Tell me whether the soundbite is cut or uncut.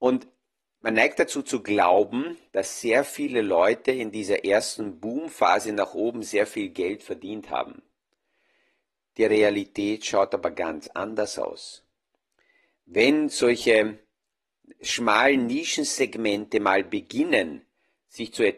uncut